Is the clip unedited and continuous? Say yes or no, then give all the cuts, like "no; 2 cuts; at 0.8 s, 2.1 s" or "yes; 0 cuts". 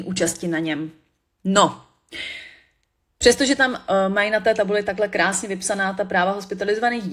yes; 0 cuts